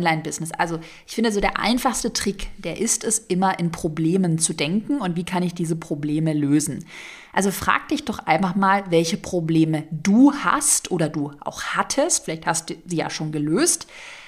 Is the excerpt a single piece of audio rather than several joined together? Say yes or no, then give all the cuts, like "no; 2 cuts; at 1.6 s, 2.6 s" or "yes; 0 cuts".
yes; 0 cuts